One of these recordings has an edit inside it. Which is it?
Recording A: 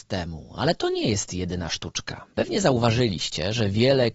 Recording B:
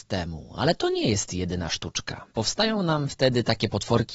B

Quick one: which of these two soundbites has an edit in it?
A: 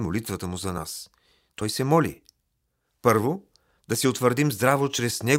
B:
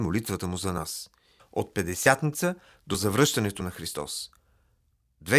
B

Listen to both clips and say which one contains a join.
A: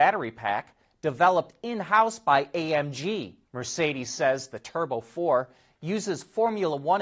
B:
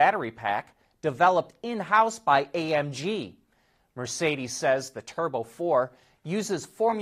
A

